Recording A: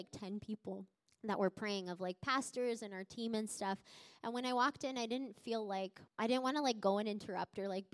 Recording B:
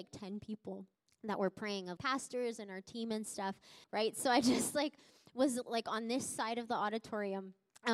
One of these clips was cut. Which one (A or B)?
B